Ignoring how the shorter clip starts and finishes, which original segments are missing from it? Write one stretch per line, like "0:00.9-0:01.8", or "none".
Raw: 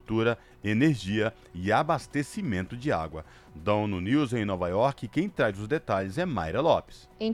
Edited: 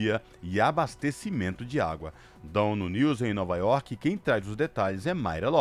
none

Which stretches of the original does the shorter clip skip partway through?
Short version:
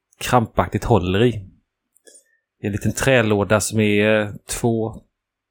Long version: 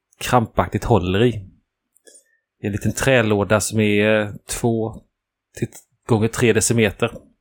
none

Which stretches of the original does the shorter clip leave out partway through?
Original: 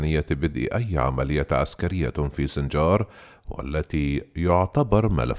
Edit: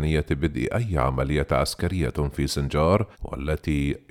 0:03.1-0:03.4

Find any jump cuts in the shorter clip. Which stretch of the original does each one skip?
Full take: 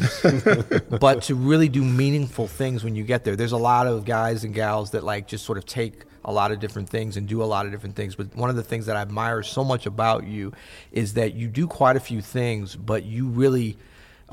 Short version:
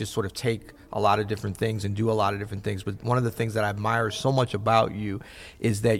none

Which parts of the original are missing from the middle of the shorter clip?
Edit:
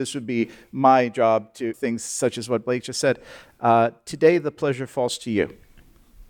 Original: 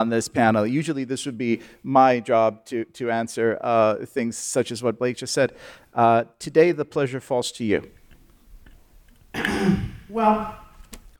0:02.8-0:04.1

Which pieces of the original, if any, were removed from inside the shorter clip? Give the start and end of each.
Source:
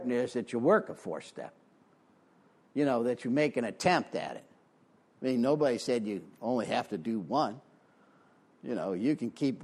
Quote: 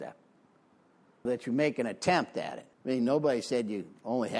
0:02.6-0:03.0
0:04.5-0:05.1

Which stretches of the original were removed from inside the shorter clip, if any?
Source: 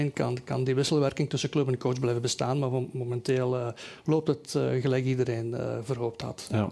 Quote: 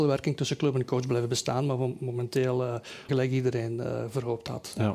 0:04.0-0:04.8

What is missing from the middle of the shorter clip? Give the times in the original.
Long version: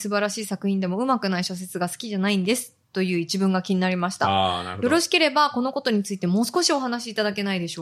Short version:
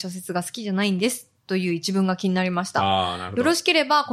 none

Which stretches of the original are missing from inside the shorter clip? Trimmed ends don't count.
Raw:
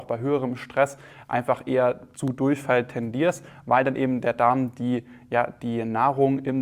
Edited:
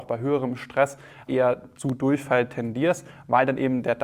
0:01.3-0:01.6

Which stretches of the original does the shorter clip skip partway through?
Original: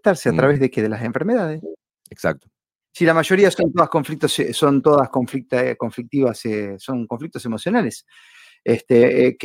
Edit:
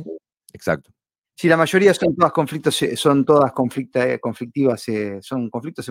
none

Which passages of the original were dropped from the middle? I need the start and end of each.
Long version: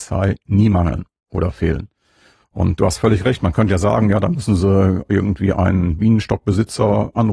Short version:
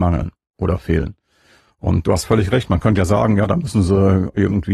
none

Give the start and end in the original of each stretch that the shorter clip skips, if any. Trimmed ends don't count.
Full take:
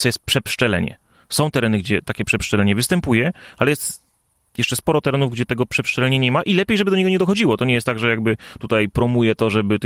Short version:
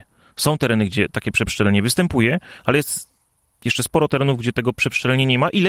none

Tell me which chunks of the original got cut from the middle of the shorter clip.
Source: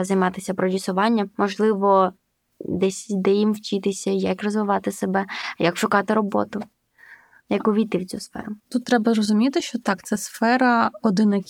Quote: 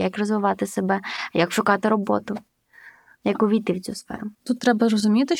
none

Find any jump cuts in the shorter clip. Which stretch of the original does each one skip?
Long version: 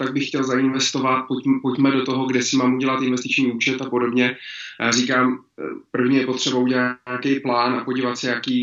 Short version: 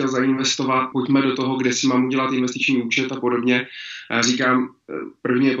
0:01.3-0:01.6

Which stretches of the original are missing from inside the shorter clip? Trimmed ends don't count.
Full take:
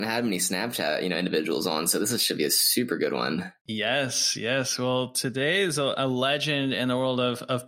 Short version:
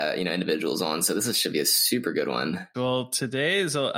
0:03.6-0:04.8

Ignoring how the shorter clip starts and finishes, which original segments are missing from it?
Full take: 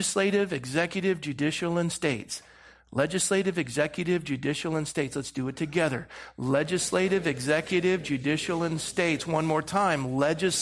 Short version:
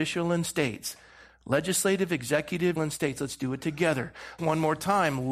0:04.2-0:04.7
0:06.3-0:09.2

